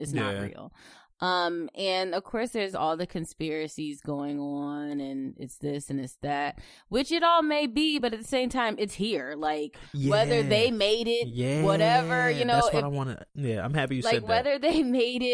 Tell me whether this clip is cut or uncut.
uncut